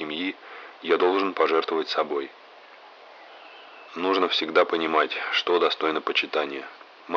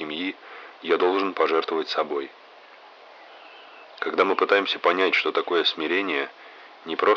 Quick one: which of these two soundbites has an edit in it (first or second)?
second